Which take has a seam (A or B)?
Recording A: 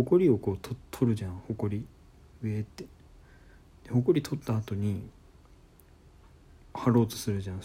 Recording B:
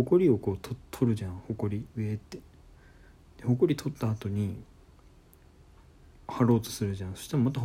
B